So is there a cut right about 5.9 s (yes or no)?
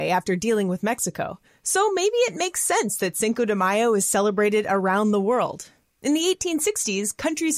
yes